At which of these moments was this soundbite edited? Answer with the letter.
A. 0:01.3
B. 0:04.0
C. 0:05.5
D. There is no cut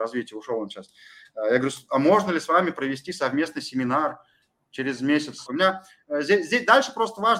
C